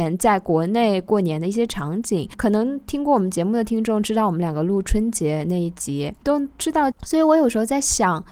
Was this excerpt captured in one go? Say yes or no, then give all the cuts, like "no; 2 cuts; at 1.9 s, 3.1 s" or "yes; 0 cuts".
no; 1 cut; at 6.9 s